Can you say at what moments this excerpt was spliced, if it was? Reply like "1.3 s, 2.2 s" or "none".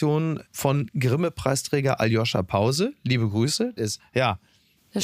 3.8 s